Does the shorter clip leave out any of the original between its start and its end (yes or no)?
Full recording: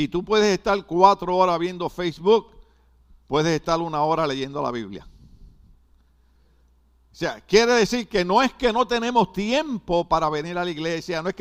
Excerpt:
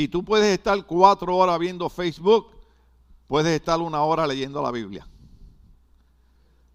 no